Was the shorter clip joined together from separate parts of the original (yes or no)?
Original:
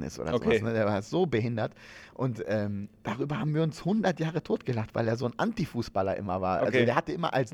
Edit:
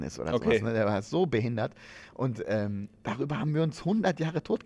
no